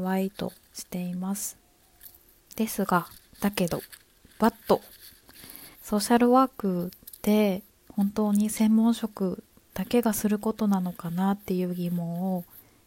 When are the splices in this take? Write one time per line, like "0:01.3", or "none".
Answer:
0:05.7